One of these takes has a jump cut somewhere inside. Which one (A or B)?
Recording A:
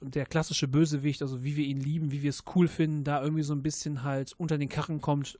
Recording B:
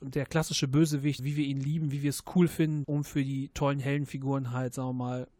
B